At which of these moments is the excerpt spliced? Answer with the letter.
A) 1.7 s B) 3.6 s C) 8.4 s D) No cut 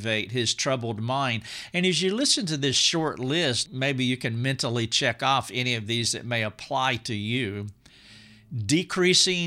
B